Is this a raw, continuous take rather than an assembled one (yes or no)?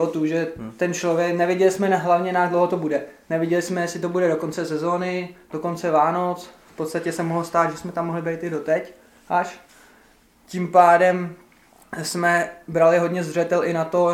yes